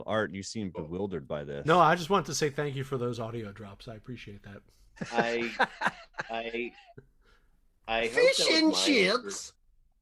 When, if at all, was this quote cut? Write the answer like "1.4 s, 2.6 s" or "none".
none